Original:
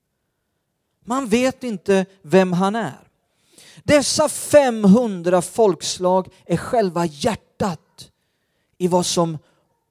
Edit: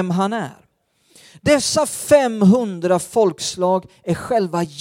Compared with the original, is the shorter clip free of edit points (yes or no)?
yes